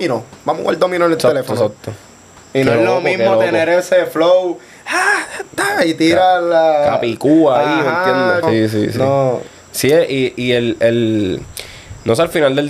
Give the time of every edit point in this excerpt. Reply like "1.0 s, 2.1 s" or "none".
8.4 s